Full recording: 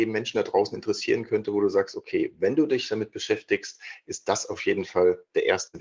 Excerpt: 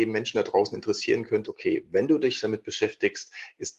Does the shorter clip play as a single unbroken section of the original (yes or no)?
no